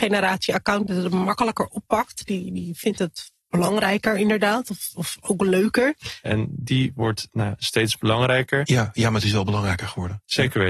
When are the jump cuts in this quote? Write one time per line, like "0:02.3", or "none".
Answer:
0:06.2
0:08.6